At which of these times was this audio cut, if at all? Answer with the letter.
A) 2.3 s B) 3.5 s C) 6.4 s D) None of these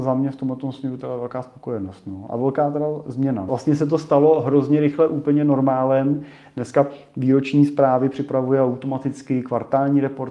B